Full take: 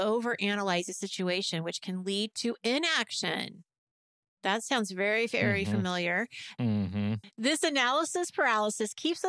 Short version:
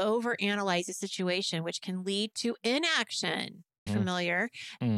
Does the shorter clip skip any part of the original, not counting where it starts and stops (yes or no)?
yes